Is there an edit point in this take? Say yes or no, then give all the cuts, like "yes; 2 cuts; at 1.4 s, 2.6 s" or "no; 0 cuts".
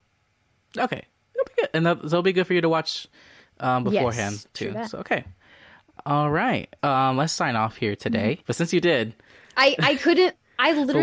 yes; 2 cuts; at 6.8 s, 8.4 s